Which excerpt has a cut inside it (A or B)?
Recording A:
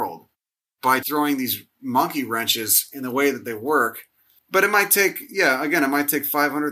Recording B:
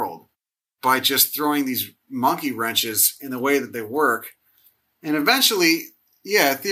A